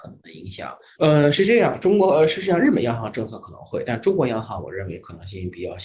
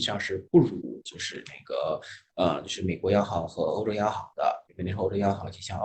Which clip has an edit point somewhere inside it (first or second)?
first